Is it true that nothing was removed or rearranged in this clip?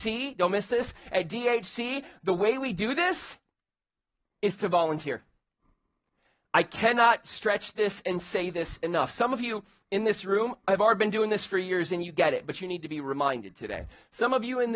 yes; 0 cuts

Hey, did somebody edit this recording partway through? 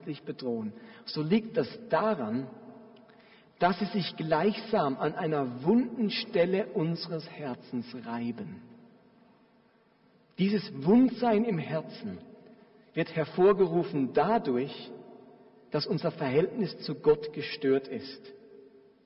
no; 0 cuts

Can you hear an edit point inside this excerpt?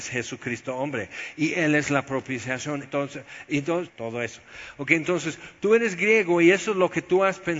yes; 2 cuts; at 2.8 s, 3.9 s

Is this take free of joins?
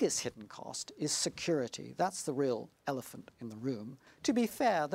yes; 0 cuts

